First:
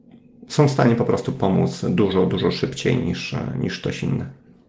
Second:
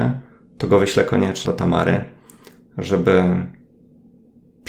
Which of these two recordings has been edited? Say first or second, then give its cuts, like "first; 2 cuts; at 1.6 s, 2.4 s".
second; 1 cut; at 1.5 s